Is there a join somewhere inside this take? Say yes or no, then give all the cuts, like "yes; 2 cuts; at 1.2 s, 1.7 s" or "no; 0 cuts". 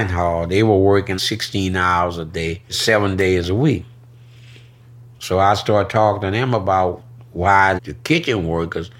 yes; 2 cuts; at 1.2 s, 7.8 s